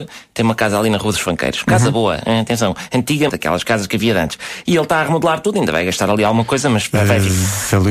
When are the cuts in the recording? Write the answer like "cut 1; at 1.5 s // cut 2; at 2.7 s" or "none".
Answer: cut 1; at 3.3 s